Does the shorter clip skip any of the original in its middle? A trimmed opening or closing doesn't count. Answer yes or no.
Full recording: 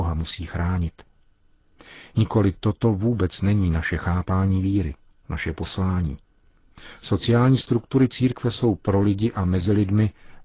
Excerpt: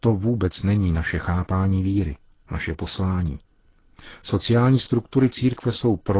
no